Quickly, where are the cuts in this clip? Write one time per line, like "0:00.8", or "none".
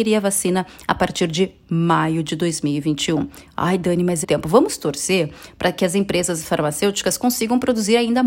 0:04.2